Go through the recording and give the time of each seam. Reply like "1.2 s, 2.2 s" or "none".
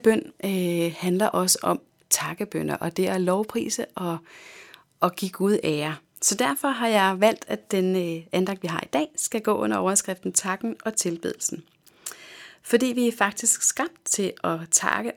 none